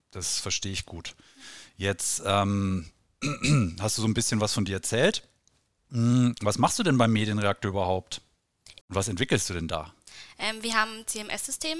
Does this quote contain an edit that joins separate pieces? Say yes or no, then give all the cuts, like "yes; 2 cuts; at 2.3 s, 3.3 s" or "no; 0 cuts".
yes; 1 cut; at 8.8 s